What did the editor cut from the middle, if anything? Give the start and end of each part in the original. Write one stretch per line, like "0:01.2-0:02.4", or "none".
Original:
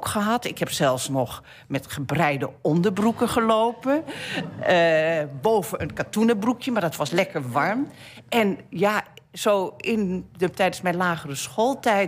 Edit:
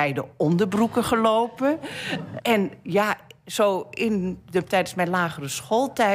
0:04.6-0:08.2

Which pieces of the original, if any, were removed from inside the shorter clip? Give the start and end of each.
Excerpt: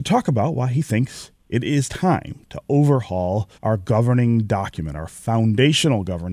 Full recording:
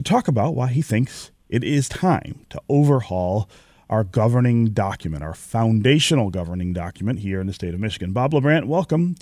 0:03.5-0:03.8

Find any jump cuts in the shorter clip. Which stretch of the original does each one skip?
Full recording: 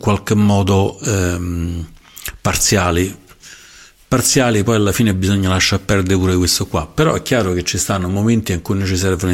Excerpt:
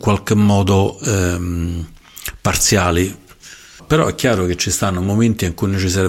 0:03.8-0:06.9

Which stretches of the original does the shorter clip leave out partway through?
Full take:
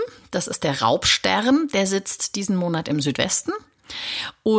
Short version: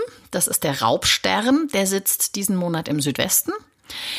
none

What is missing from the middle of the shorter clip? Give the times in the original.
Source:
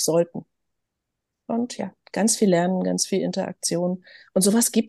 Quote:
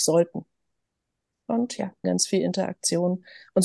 0:02.0-0:02.8

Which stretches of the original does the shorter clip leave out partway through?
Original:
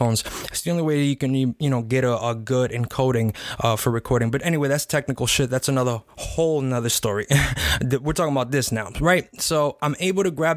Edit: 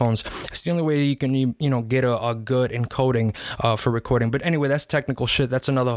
none

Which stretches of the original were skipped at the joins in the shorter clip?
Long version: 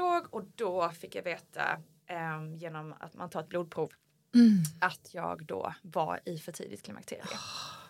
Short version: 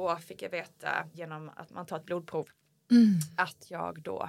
0:01.9-0:02.6

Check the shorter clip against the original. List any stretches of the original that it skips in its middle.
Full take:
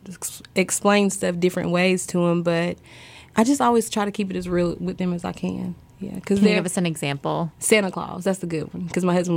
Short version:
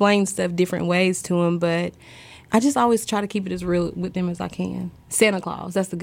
0:05.9-0:07.5

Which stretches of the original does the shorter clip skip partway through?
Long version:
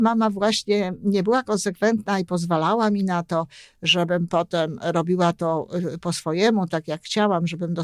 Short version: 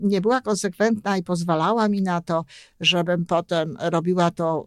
none

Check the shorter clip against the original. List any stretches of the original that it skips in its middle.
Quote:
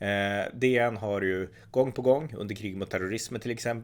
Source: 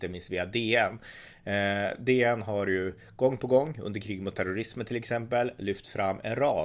none

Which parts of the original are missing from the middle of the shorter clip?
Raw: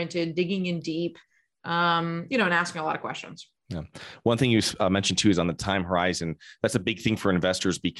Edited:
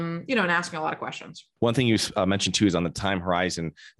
0:03.6-0:04.2

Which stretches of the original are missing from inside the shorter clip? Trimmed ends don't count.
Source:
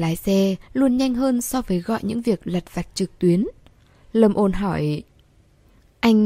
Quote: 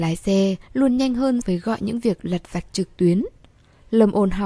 0:01.4-0:01.6

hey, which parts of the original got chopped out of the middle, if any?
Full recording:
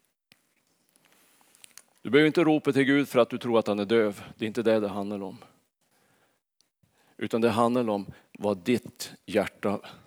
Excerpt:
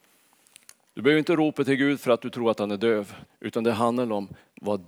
0:04.3-0:07.0

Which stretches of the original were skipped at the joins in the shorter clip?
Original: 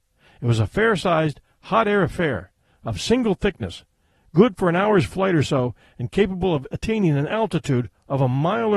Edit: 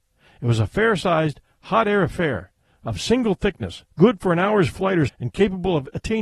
0:03.9-0:04.3
0:05.4-0:05.9

